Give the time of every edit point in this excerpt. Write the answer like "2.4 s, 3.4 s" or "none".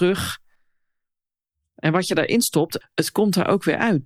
2.8 s

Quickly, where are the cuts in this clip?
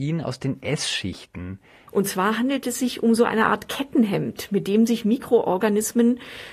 1.9 s

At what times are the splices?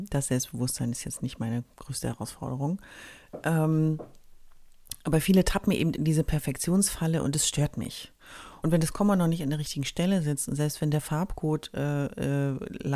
8.6 s

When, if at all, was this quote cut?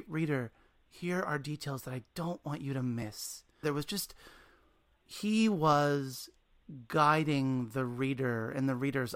3.6 s

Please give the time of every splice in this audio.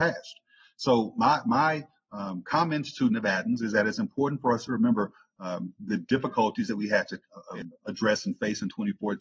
none

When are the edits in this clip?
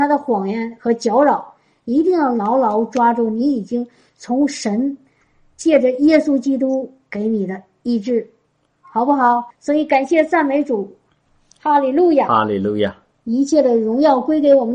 9.5 s

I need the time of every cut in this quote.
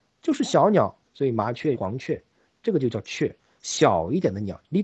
1.7 s

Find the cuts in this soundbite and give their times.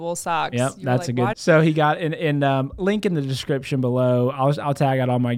1.3 s

